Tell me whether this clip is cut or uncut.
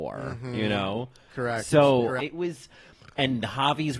cut